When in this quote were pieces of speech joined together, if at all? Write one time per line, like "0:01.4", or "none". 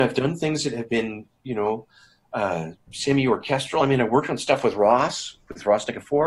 none